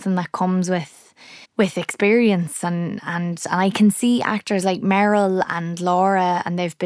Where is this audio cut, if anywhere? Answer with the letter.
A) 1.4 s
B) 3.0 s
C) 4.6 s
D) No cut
A